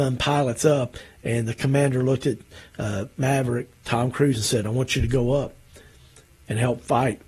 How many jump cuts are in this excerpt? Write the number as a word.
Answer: zero